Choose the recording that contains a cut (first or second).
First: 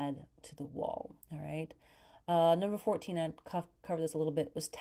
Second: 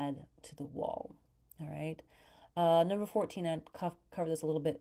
first